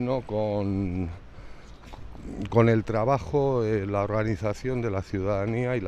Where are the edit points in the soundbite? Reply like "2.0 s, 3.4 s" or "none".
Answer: 2.5 s